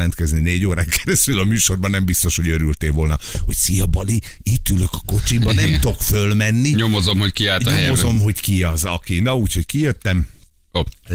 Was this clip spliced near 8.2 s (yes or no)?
no